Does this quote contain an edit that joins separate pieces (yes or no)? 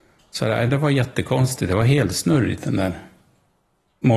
no